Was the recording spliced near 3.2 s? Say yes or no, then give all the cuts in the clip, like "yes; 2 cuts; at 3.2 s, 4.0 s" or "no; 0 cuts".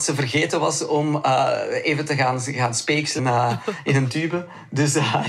yes; 1 cut; at 3.2 s